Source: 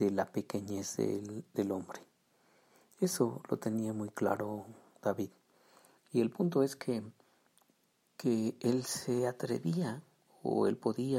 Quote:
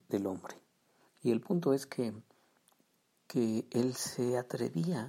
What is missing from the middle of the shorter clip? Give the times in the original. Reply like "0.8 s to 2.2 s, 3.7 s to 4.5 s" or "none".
2.5 s to 5.9 s